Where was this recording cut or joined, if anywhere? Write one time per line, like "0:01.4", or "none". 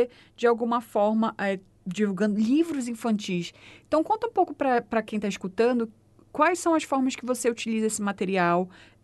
none